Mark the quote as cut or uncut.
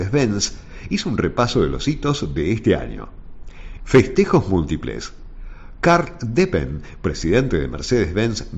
cut